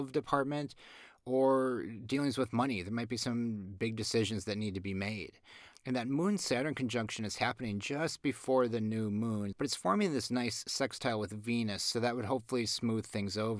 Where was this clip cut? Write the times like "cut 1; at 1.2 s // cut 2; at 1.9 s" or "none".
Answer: cut 1; at 5.7 s // cut 2; at 9.5 s

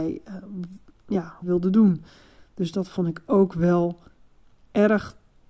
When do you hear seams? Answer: cut 1; at 1.4 s

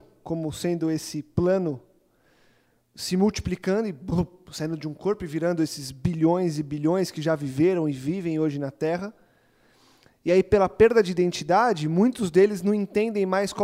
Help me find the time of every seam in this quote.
none

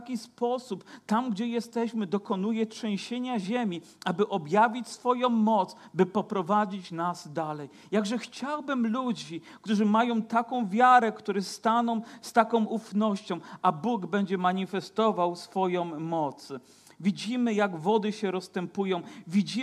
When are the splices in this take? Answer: none

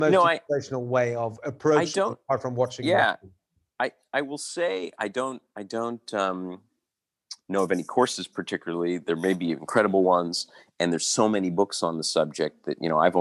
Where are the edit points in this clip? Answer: none

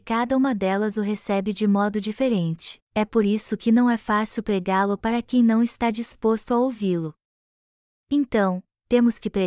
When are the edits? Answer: cut 1; at 2.8 s

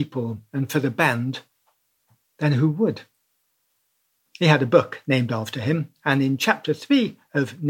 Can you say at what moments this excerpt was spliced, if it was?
cut 1; at 4.3 s

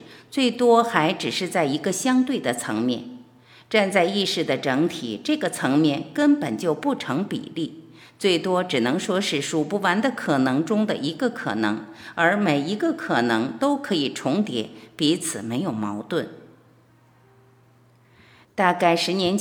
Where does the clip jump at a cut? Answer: none

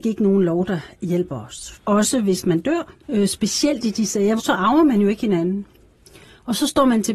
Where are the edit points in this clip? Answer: cut 1; at 1.7 s // cut 2; at 3.0 s // cut 3; at 4.4 s

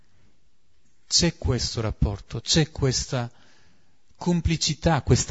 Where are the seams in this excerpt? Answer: none

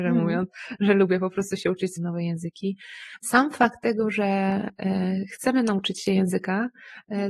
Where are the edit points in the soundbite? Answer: cut 1; at 2.0 s // cut 2; at 3.2 s

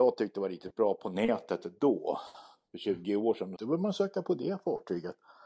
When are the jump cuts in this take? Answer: cut 1; at 3.6 s

